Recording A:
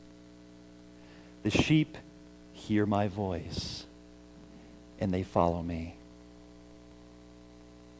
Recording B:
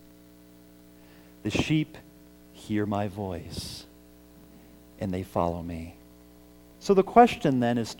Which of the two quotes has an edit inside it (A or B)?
B